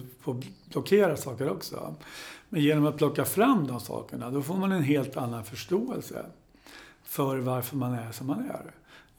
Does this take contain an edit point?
no; 0 cuts

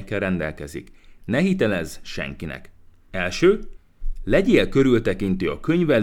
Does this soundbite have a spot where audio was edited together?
yes; 1 cut; at 3.1 s

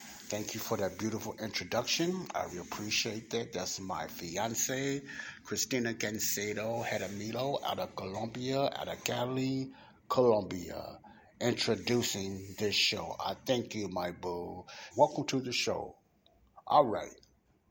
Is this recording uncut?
no; 2 cuts; at 2.5 s, 14.9 s

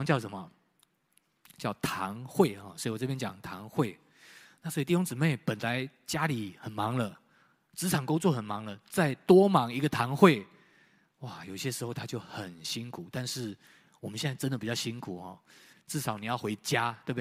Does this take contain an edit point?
yes; 1 cut; at 15.7 s

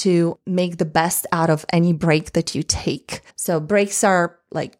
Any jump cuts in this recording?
yes; 1 cut; at 3.3 s

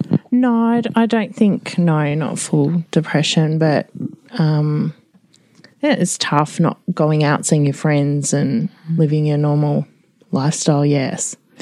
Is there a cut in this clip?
no; 0 cuts

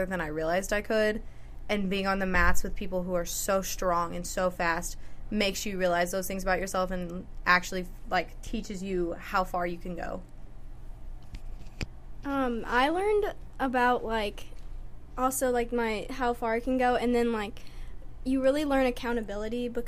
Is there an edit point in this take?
no; 0 cuts

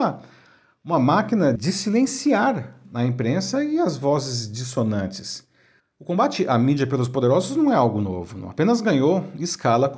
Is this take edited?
yes; 2 cuts; at 1.6 s, 5.8 s

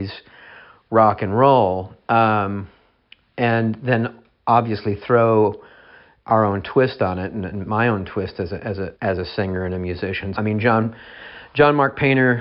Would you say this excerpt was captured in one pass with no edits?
no; 2 cuts; at 8.9 s, 10.3 s

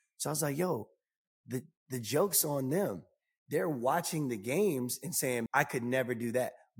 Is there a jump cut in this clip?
yes; 1 cut; at 5.5 s

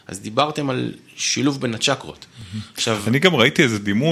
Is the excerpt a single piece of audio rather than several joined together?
yes; 0 cuts

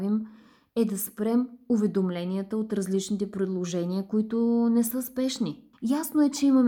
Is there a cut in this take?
yes; 1 cut; at 5.7 s

